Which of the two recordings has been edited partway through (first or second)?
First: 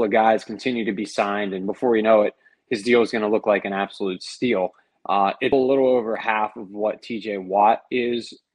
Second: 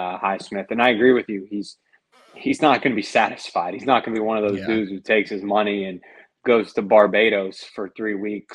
first